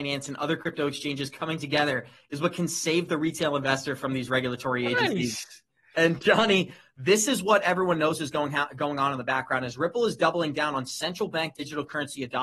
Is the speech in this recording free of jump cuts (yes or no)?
yes